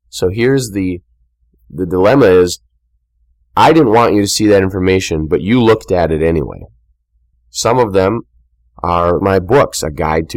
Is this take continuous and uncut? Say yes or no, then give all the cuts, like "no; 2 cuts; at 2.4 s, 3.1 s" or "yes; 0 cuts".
no; 2 cuts; at 7.3 s, 9.2 s